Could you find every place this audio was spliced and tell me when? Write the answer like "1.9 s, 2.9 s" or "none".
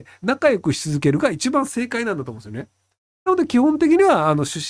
none

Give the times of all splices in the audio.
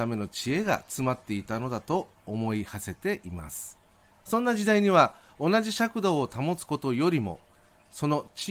4.1 s

